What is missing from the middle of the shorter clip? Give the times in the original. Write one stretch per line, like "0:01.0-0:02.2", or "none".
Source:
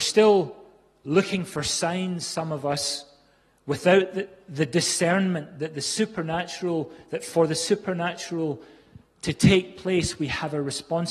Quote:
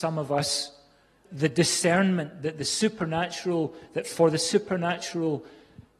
0:03.6-0:04.4